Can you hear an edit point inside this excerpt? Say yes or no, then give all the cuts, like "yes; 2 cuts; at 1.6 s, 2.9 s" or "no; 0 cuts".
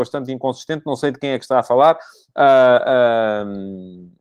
no; 0 cuts